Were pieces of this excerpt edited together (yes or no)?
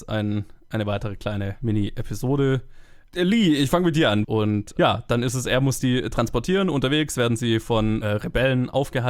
yes